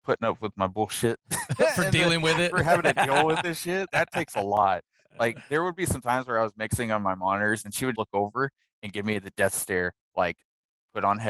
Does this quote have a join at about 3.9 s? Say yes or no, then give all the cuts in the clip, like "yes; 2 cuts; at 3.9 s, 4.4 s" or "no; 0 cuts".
yes; 2 cuts; at 3.9 s, 8.0 s